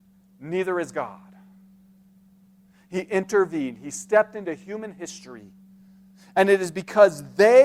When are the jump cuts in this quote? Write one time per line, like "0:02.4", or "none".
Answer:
none